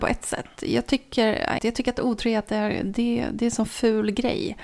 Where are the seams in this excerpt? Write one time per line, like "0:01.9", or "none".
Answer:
0:01.6